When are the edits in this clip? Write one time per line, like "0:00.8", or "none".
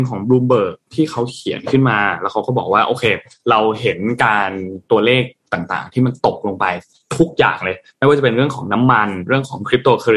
none

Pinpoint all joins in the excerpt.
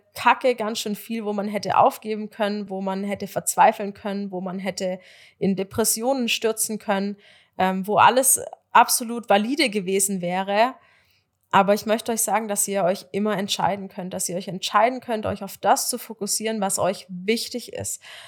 none

